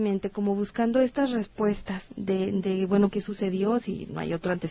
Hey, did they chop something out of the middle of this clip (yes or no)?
yes